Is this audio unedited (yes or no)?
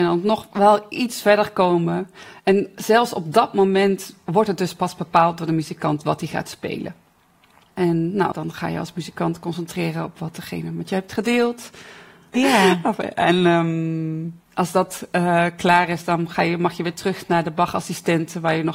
no